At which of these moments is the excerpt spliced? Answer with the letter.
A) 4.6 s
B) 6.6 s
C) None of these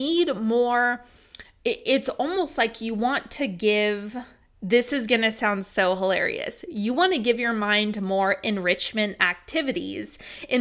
C